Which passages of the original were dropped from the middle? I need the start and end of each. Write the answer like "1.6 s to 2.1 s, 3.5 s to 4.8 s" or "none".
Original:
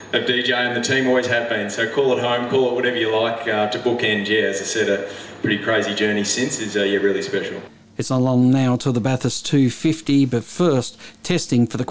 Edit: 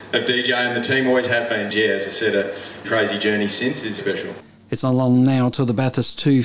1.7 s to 4.2 s, 5.4 s to 5.6 s, 6.7 s to 7.3 s